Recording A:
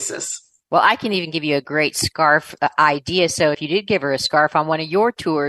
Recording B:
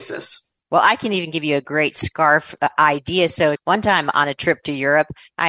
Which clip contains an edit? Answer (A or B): B